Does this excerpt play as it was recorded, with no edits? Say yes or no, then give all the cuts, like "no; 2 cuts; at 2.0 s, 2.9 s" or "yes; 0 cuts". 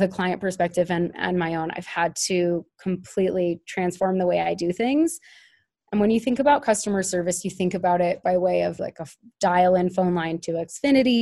no; 2 cuts; at 5.8 s, 8.8 s